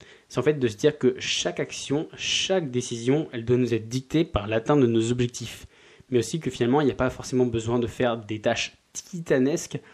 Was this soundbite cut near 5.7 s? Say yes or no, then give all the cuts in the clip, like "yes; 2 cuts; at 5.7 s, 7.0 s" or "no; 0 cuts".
no; 0 cuts